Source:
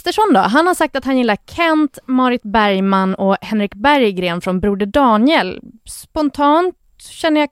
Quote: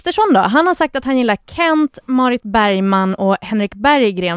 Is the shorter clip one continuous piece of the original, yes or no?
yes